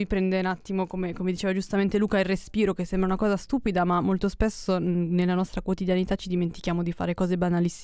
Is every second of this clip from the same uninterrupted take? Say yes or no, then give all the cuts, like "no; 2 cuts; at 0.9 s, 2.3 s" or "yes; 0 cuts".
yes; 0 cuts